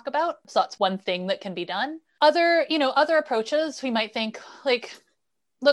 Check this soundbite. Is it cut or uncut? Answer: uncut